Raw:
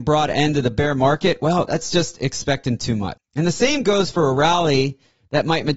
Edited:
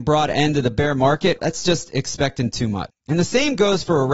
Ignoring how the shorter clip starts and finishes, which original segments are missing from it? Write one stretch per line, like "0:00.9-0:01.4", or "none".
0:01.4-0:01.7